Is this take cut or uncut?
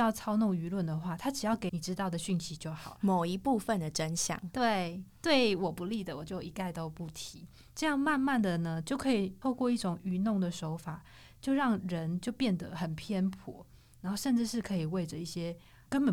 cut